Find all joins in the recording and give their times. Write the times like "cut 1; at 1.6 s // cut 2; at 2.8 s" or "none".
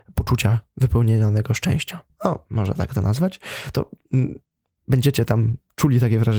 cut 1; at 2.1 s